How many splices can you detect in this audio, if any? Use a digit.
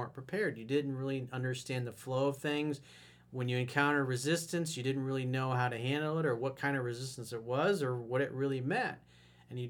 0